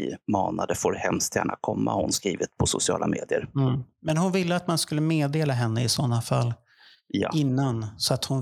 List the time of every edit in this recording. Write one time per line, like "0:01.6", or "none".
none